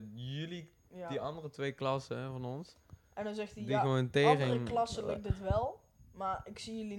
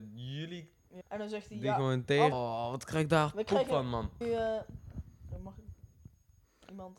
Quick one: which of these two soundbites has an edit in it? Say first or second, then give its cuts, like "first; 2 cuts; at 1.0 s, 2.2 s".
second; 3 cuts; at 1.0 s, 2.3 s, 4.2 s